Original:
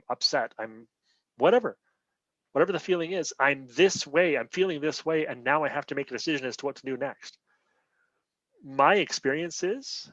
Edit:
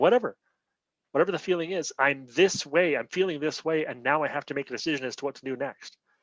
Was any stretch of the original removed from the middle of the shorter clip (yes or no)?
no